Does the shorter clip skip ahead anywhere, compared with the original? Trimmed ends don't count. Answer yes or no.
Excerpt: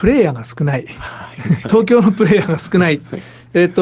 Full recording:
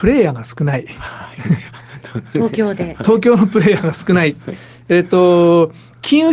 yes